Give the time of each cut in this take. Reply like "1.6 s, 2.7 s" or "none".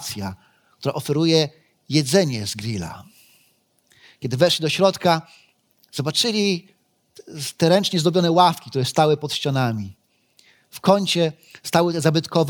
none

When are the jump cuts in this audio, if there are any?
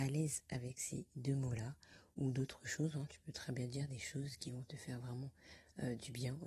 none

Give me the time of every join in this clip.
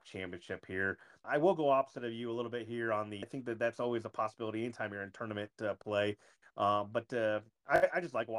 1.2 s, 3.2 s

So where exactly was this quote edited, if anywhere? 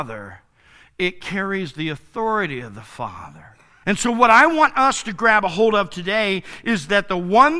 3.8 s

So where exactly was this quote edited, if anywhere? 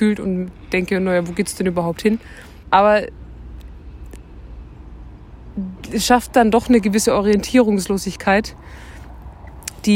2.6 s

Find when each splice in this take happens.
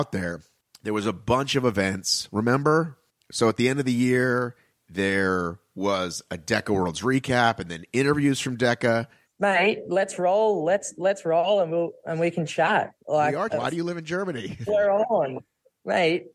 9.2 s, 13.5 s, 14.7 s

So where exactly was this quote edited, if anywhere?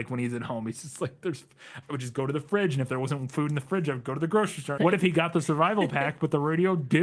4.8 s

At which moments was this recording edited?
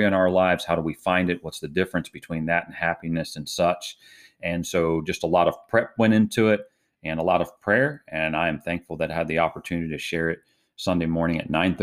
none

